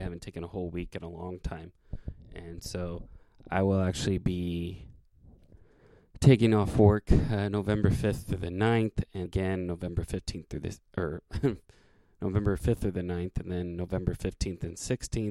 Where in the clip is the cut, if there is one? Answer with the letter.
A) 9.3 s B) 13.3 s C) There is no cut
A